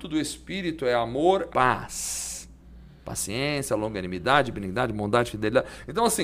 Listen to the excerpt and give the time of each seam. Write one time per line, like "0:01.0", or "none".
0:01.5